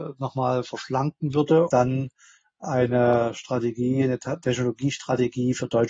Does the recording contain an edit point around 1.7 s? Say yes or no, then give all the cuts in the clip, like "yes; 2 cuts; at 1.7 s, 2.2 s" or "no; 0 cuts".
yes; 1 cut; at 1.7 s